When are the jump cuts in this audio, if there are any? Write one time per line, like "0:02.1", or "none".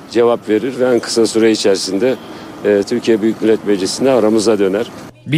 0:02.8